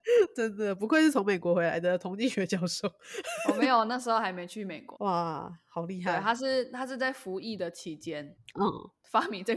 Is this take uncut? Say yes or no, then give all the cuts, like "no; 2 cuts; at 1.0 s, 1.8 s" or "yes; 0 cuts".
no; 1 cut; at 4.9 s